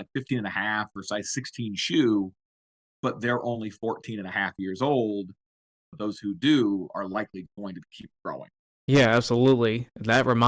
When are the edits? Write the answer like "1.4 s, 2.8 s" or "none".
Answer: 5.8 s, 8.7 s